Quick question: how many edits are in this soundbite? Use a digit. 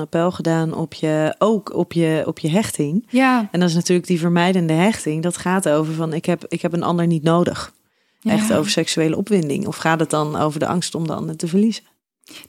1